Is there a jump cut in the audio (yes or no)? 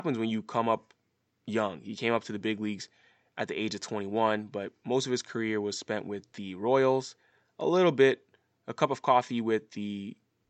no